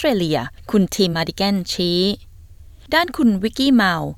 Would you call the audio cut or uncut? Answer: cut